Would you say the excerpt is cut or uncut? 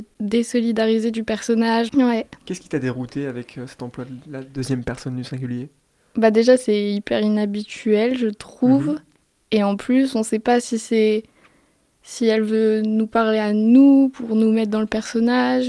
cut